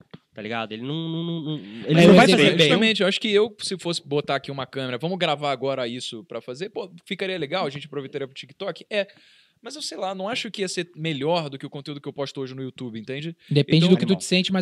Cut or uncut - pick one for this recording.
uncut